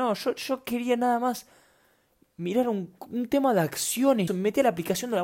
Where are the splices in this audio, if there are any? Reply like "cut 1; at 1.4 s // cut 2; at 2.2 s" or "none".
cut 1; at 3.0 s // cut 2; at 4.3 s